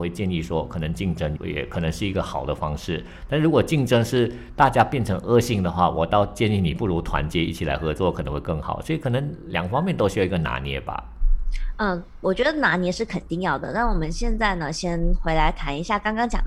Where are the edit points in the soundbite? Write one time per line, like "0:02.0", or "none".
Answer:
0:01.4